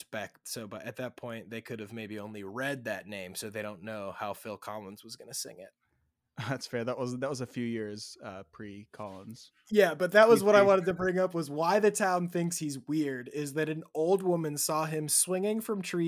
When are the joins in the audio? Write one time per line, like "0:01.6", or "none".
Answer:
none